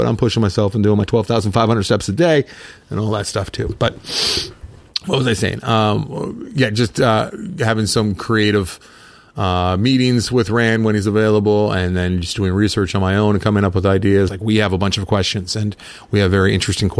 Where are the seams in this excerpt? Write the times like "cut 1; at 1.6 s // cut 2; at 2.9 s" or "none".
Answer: cut 1; at 14.3 s